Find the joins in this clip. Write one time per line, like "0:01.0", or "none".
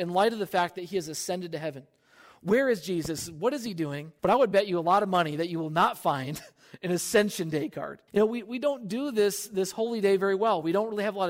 0:04.2
0:08.1